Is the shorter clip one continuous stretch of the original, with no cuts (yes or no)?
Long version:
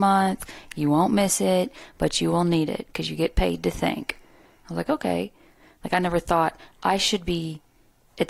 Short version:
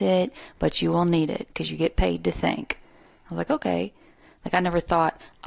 yes